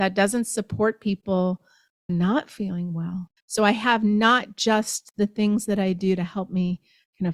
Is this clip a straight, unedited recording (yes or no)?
no